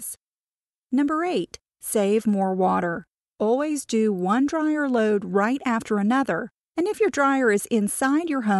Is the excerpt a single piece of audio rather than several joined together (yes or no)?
no